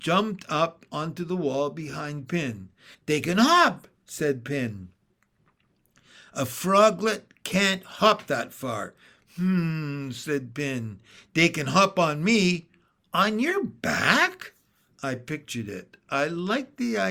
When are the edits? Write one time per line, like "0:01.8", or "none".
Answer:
0:02.9